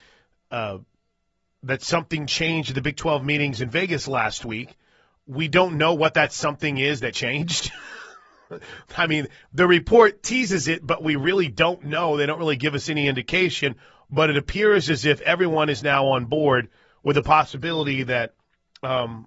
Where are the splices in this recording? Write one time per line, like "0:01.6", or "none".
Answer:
none